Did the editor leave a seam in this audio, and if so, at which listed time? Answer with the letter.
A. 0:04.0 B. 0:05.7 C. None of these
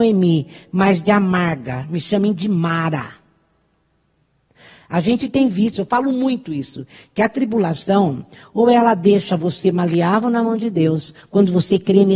B